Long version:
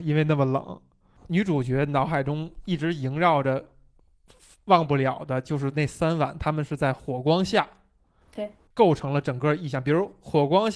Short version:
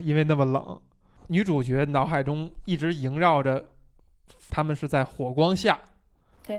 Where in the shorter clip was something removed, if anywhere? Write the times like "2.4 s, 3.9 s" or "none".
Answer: 4.5 s